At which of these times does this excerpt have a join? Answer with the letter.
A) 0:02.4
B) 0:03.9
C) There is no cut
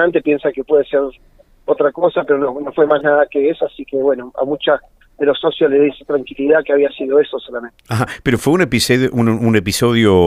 C